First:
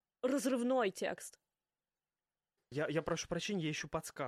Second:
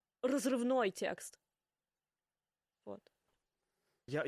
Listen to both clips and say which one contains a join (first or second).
first